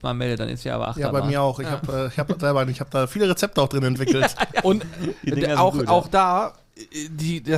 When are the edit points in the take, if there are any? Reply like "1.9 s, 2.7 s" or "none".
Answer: none